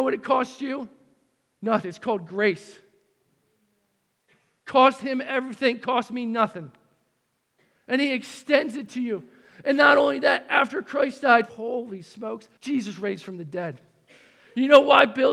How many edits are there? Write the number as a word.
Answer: two